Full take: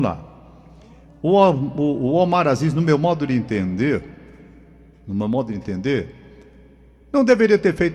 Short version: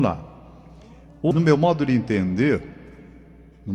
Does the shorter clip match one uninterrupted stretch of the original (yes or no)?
no